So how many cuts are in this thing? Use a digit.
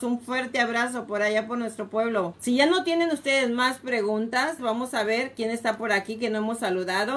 2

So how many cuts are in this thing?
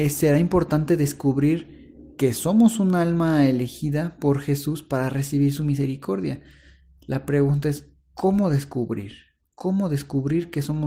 1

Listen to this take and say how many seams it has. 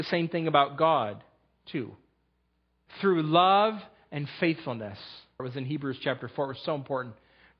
2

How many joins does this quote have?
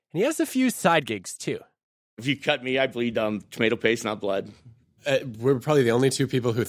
2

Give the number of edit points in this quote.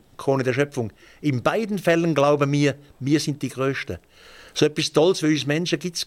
0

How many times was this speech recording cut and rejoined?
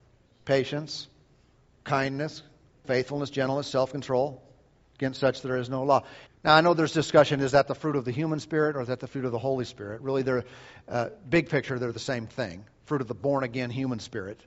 2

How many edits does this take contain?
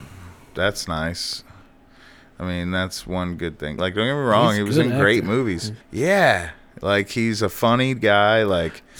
2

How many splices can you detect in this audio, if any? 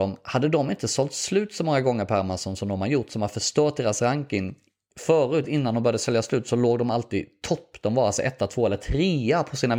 0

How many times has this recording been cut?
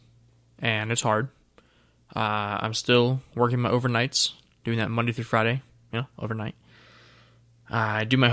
0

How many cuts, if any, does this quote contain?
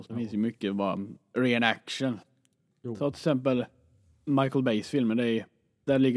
0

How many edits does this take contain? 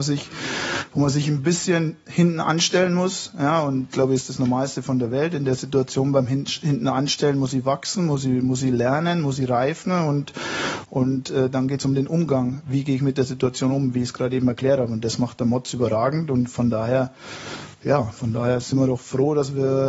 1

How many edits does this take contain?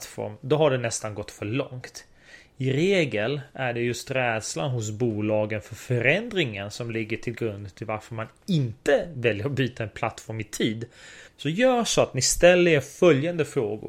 1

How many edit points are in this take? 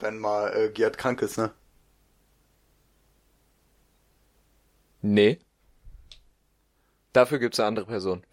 0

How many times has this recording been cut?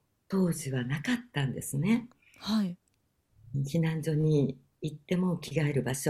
0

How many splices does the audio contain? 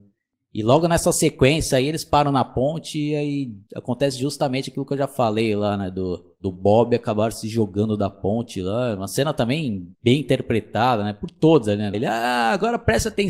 3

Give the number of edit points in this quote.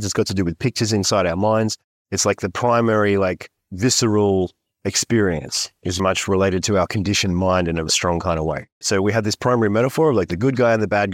2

